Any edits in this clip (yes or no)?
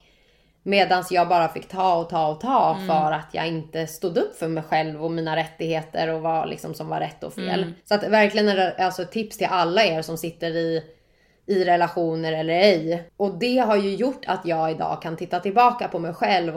yes